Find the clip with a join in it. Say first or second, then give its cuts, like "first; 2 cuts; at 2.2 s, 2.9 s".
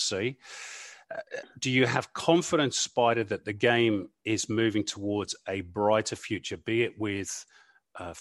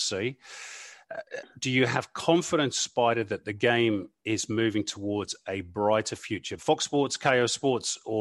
second; 1 cut; at 6.6 s